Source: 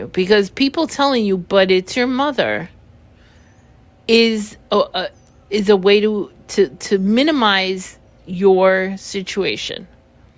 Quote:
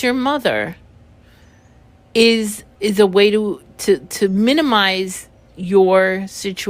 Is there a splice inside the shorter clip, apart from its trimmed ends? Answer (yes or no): yes